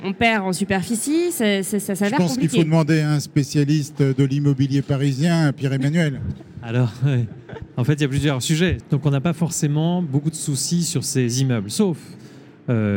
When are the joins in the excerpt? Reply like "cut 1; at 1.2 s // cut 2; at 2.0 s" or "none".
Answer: cut 1; at 8.8 s